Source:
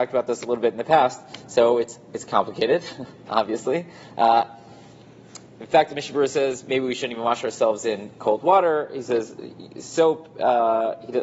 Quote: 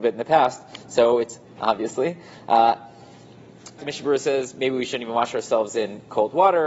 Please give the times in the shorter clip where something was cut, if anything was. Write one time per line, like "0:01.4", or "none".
0:01.5
0:03.8